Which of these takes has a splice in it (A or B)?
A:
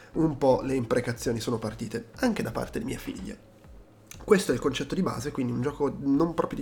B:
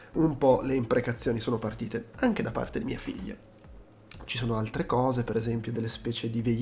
B